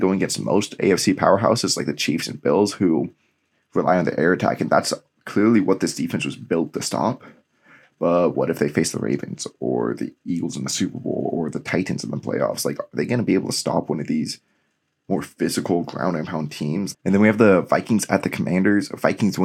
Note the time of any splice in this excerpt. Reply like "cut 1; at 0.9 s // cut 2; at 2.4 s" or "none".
cut 1; at 16.9 s